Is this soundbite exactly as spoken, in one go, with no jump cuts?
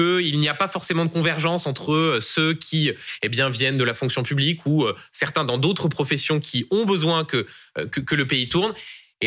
yes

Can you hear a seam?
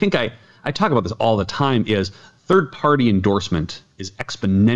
no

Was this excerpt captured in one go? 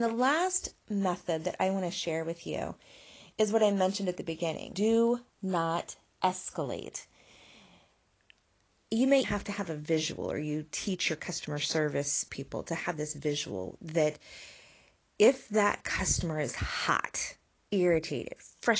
no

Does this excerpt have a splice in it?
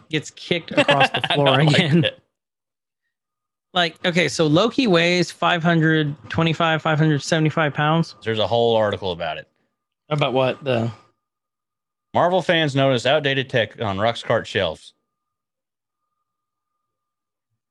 yes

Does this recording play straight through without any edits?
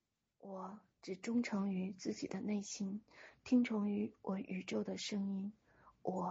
no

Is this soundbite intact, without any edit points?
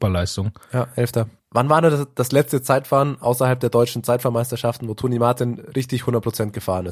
no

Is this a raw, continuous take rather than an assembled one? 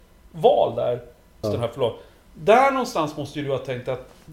no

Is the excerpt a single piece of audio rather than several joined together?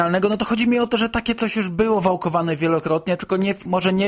yes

